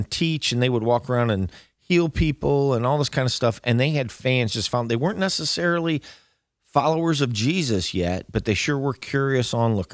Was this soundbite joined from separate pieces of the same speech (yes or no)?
no